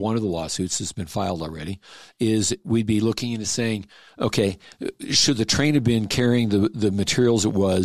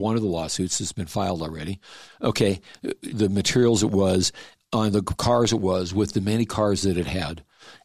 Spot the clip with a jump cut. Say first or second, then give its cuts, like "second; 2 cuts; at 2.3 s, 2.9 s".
second; 2 cuts; at 2.1 s, 3.1 s